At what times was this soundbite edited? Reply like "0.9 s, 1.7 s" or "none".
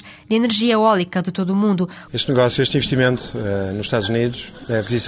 2.1 s